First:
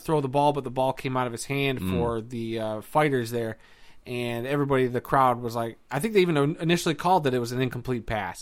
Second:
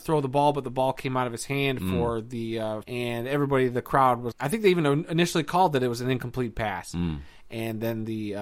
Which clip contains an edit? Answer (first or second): second